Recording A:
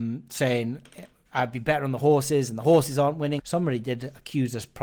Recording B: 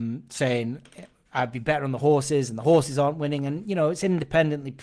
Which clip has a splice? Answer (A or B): A